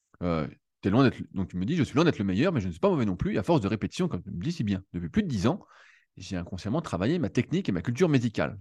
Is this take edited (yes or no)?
no